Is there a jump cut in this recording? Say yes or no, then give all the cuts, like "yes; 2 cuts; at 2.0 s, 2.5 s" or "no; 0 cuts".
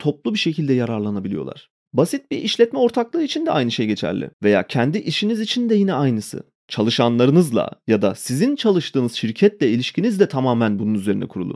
no; 0 cuts